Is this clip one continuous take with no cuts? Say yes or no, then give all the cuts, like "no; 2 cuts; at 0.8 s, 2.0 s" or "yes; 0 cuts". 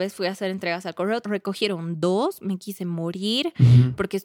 no; 1 cut; at 1.2 s